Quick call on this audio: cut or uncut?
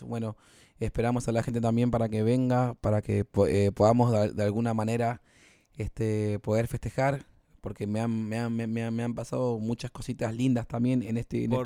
uncut